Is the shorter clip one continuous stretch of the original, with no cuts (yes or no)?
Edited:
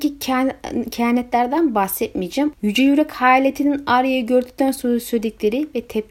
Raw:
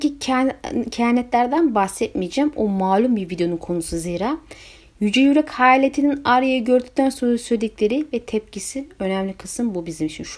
no